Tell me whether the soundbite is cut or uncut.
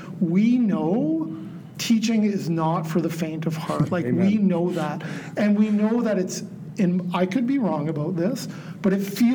uncut